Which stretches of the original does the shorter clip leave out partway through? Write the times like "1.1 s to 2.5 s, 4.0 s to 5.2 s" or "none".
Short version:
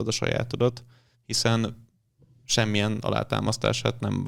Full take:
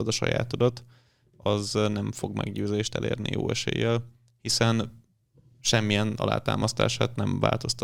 1.1 s to 4.3 s

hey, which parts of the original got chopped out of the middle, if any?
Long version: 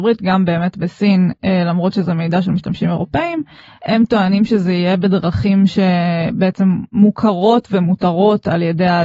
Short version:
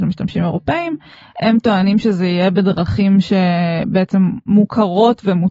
none

